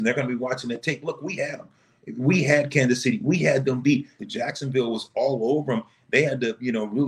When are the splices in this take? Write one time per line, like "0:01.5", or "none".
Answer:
0:04.2